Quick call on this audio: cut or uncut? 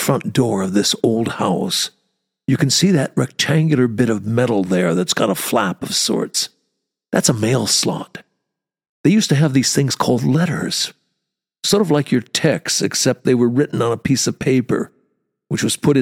uncut